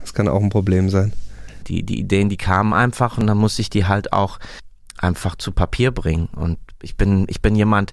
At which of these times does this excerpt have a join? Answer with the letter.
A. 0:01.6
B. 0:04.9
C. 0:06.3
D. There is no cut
A